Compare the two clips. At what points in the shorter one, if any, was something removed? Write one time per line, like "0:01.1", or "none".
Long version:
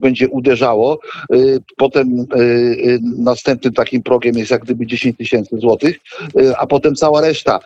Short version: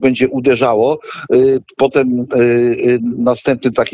none